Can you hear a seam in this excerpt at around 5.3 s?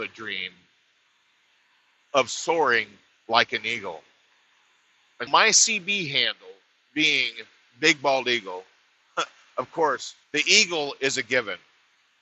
yes; 2 cuts; at 5.3 s, 10.2 s

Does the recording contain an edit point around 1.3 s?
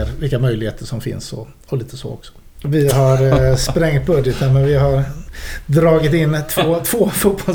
no; 1 cut; at 2.6 s

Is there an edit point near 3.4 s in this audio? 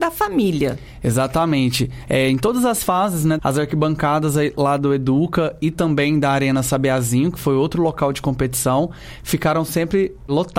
yes; 1 cut; at 3.4 s

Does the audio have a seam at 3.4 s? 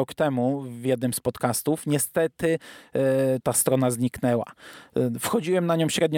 yes; 1 cut; at 3.4 s

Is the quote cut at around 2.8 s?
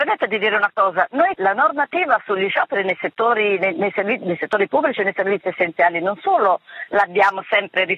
no; 1 cut; at 1.3 s

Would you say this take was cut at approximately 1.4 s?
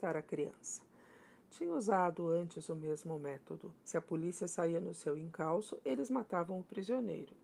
no; 1 cut; at 3.8 s

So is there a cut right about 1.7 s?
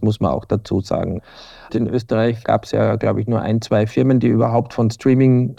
yes; 1 cut; at 1.7 s

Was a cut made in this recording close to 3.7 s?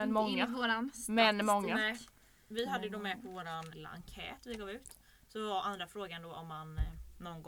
yes; 1 cut; at 3.7 s

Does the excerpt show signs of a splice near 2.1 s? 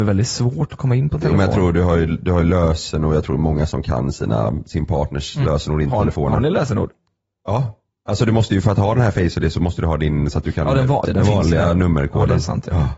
no; 1 cut; at 11.0 s

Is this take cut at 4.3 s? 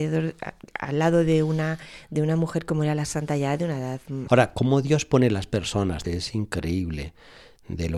yes; 2 cuts; at 4.3 s, 6.0 s

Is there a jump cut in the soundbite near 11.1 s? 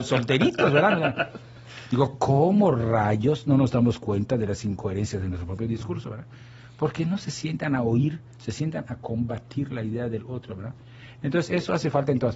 no; 0 cuts

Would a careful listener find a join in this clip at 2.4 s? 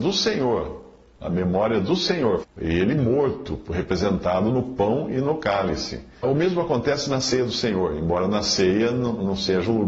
yes; 2 cuts; at 2.4 s, 6.2 s

